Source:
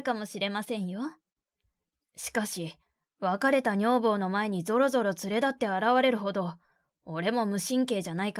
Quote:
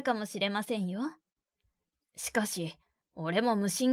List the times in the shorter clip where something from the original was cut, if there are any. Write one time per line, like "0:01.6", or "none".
0:03.0